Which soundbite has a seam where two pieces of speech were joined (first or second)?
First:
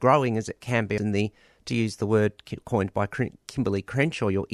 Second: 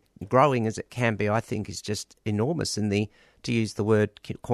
first